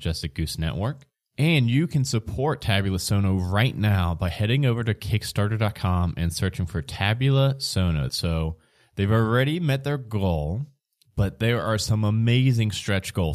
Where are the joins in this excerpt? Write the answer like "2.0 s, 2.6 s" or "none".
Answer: 8.1 s